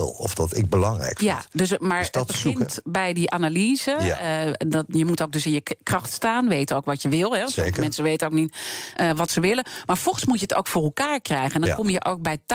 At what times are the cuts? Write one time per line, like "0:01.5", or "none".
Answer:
none